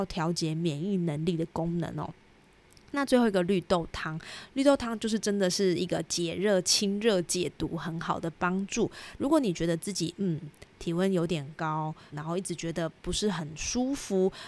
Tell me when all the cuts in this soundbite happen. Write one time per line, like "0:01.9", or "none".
0:09.2
0:12.1